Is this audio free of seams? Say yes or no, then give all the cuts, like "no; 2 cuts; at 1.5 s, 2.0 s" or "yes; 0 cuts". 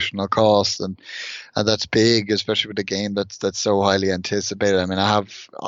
yes; 0 cuts